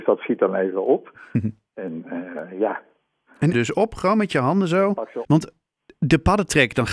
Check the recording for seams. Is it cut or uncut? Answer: cut